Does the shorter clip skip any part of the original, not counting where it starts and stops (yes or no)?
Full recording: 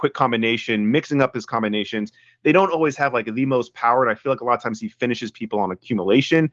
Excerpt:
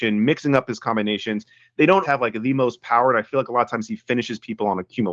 yes